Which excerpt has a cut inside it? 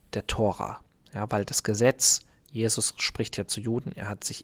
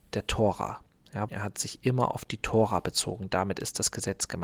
second; 1 cut; at 1.3 s

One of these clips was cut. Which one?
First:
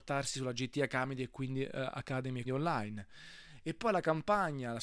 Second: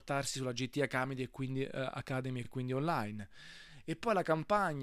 first; 1 cut; at 2.4 s

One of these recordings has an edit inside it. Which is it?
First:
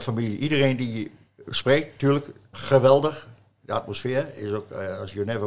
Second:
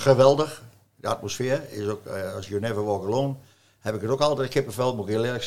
first; 1 cut; at 2.5 s

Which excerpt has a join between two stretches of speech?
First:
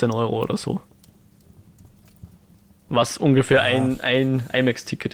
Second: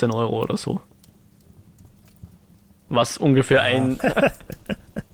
second; 1 cut; at 4.0 s

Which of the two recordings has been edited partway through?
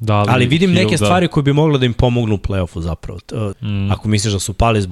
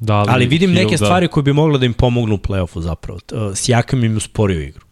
first; 1 cut; at 3.5 s

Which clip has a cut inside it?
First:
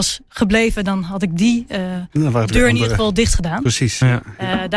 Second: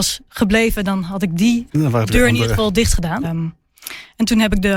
second; 2 cuts; at 1.7 s, 3.2 s

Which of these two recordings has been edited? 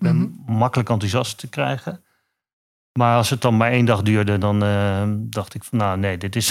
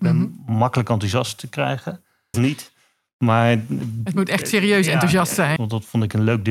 second; 2 cuts; at 2.3 s, 5.6 s

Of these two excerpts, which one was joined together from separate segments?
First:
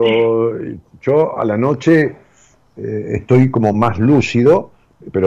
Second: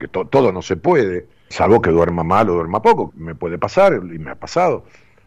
second; 2 cuts; at 1.5 s, 3.1 s

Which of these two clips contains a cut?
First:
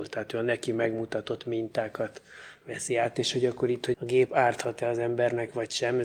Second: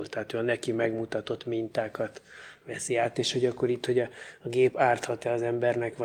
first; 1 cut; at 3.9 s

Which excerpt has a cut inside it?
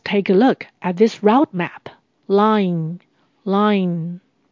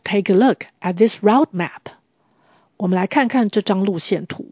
first; 1 cut; at 2.2 s

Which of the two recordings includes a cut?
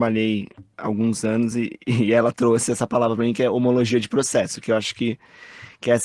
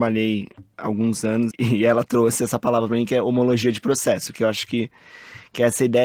second; 1 cut; at 1.5 s

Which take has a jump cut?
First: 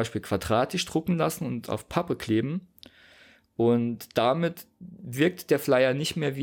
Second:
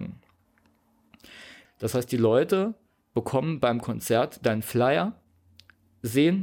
second; 1 cut; at 1.6 s

